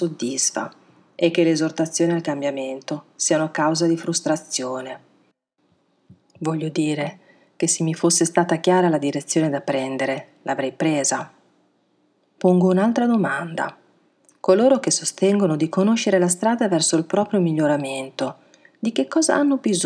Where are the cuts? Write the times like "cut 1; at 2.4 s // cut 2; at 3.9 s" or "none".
none